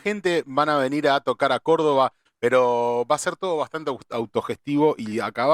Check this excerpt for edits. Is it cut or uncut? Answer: cut